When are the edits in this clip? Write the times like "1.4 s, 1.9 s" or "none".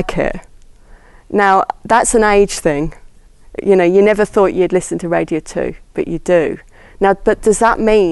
none